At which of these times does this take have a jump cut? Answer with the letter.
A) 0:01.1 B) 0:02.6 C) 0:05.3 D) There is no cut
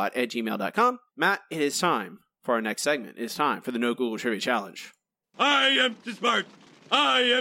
A